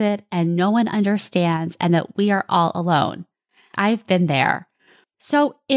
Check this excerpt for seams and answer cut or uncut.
cut